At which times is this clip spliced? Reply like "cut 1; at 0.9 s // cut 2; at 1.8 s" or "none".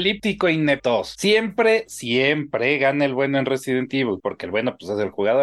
none